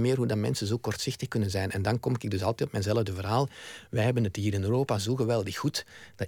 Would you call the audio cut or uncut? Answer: uncut